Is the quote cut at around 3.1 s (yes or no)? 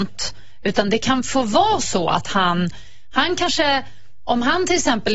no